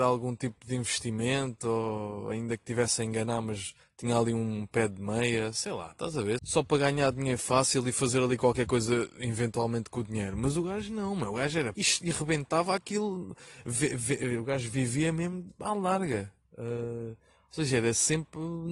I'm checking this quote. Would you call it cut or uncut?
cut